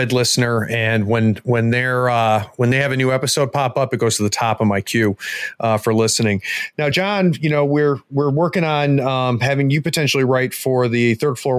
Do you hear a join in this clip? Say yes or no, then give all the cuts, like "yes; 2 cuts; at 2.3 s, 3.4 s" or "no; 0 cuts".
no; 0 cuts